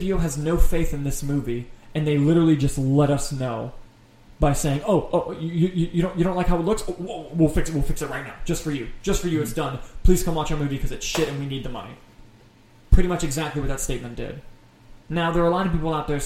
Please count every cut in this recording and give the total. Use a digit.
0